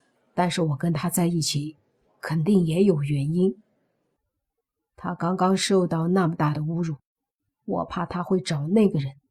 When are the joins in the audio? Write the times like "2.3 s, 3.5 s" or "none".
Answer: 4.2 s, 7.5 s